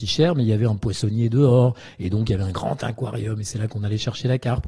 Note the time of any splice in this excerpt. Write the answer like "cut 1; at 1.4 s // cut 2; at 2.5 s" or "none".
none